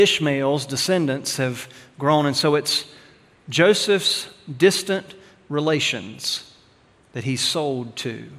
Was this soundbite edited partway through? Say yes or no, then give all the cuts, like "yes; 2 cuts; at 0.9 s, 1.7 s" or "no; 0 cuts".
no; 0 cuts